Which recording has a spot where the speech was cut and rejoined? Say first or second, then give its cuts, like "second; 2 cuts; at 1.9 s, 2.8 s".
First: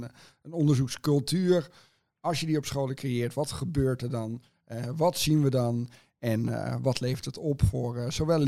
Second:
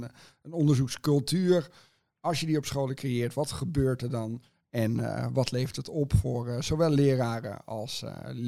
second; 1 cut; at 4.6 s